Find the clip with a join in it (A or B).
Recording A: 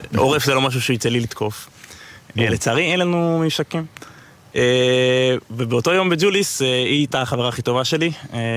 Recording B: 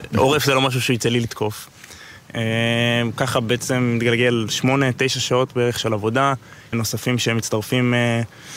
B